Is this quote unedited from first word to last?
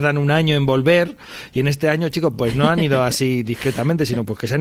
yes; 0 cuts

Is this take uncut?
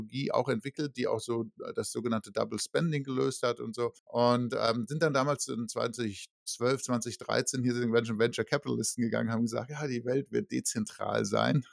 no; 1 cut; at 4.0 s

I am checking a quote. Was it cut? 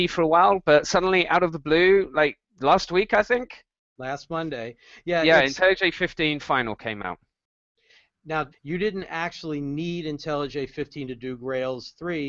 yes; 2 cuts; at 2.5 s, 8.5 s

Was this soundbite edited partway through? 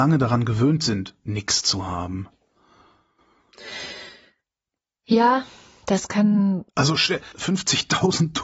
no; 0 cuts

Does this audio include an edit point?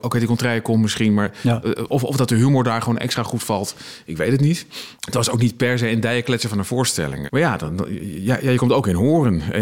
yes; 2 cuts; at 5.0 s, 7.3 s

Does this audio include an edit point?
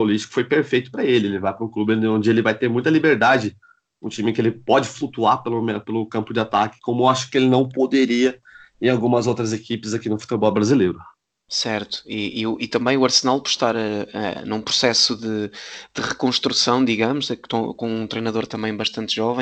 no; 0 cuts

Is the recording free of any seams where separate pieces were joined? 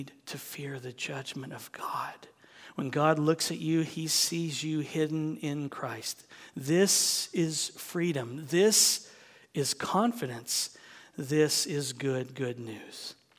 yes; 0 cuts

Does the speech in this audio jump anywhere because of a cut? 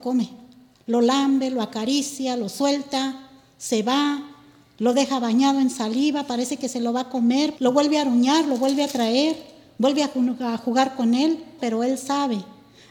yes; 2 cuts; at 7.6 s, 11.6 s

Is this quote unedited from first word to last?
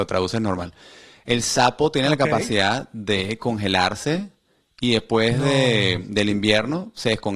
yes; 0 cuts

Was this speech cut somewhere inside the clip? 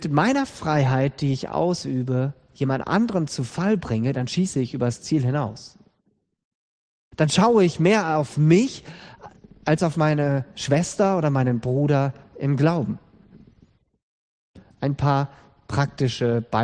no; 0 cuts

